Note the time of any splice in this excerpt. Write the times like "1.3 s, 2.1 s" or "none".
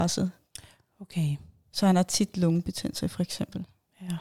none